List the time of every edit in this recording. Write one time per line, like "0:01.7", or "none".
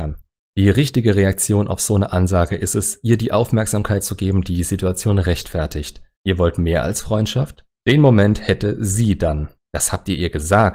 0:07.7
0:09.5

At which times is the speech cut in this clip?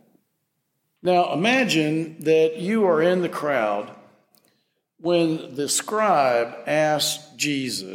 0:01.0

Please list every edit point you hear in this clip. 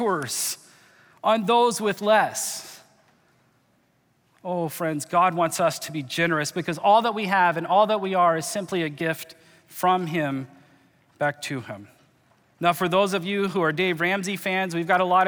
none

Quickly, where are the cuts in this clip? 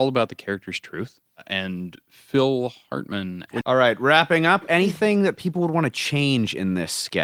0:03.6

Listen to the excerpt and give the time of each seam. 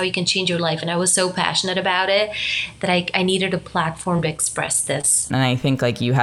0:05.3

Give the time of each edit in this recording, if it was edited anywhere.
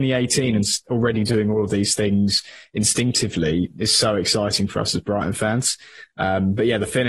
none

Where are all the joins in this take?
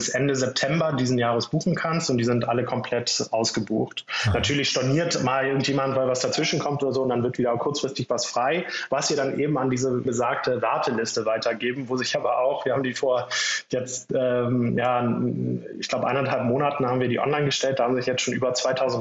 0:10.1

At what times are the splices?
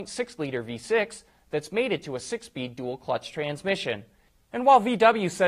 none

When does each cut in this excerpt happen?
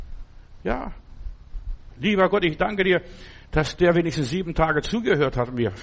0:01.9

